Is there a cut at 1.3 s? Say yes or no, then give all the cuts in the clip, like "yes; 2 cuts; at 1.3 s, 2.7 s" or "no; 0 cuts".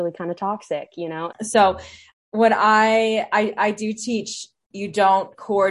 yes; 1 cut; at 1.3 s